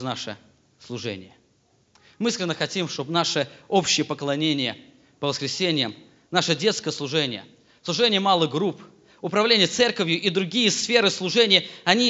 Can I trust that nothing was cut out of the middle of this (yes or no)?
yes